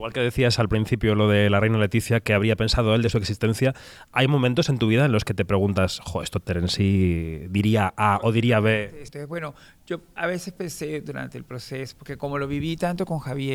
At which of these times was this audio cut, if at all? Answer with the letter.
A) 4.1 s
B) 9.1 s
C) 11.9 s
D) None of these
B